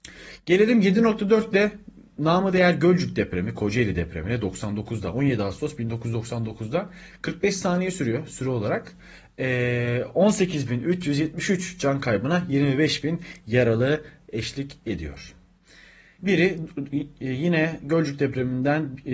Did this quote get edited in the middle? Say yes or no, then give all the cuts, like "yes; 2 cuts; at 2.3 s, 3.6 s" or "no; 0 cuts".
yes; 1 cut; at 16.2 s